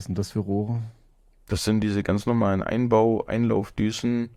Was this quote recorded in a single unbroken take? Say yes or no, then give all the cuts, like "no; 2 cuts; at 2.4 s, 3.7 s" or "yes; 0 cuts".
yes; 0 cuts